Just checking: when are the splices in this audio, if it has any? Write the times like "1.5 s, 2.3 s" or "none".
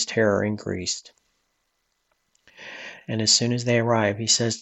3.0 s